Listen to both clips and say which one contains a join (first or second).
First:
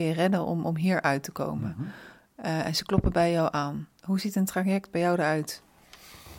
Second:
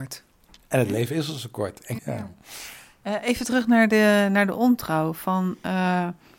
second